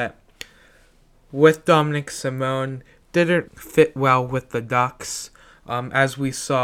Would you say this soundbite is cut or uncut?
cut